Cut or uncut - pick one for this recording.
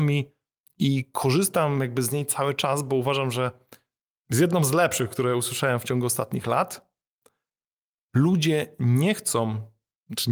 uncut